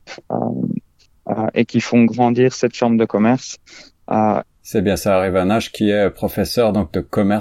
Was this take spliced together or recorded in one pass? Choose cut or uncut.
cut